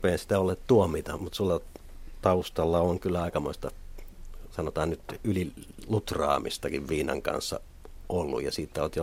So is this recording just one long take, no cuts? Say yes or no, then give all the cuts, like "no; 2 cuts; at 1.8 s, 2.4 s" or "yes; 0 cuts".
no; 1 cut; at 1.2 s